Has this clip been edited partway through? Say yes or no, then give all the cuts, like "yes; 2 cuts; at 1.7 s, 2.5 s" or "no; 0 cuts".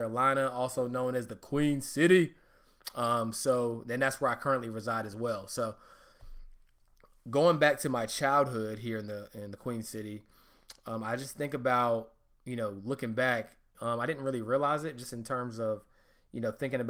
yes; 1 cut; at 13.7 s